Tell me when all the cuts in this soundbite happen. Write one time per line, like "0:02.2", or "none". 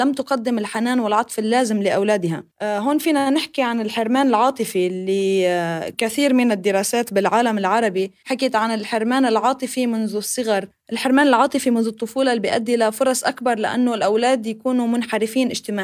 0:02.5